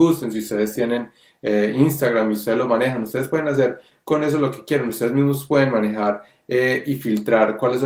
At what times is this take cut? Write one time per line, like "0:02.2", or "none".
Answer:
none

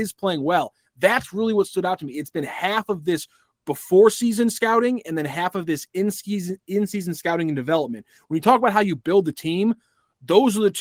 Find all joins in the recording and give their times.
none

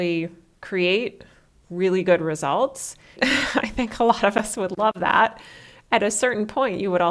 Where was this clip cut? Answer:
0:03.2

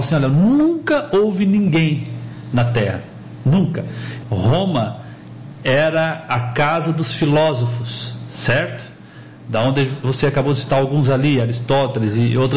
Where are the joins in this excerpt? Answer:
0:04.2

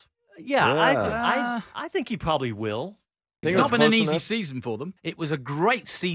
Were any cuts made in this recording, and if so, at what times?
0:03.4
0:05.0

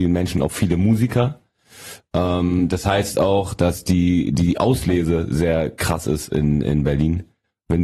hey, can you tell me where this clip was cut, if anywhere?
none

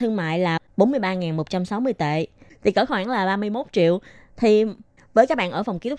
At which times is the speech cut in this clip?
none

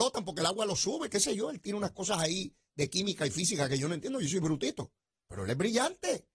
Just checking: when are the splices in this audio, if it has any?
none

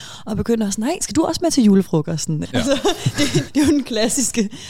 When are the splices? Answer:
0:02.5
0:03.5

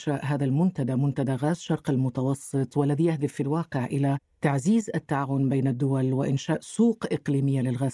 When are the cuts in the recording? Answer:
none

